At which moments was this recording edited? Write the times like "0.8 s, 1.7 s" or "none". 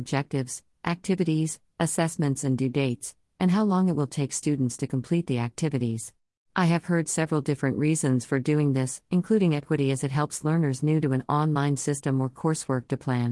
6.4 s